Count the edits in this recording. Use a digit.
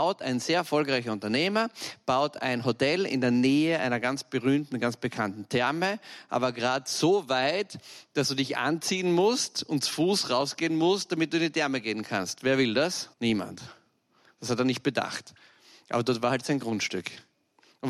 1